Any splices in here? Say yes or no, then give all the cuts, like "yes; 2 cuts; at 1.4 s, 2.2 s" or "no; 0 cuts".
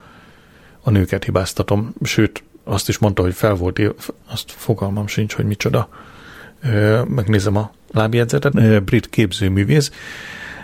yes; 3 cuts; at 1.9 s, 4.2 s, 8.5 s